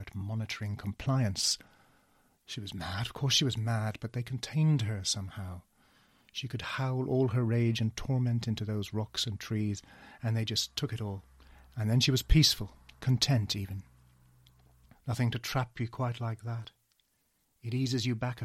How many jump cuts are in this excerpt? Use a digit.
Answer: 2